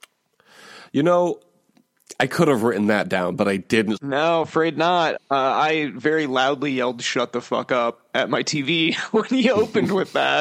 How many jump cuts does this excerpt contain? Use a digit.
2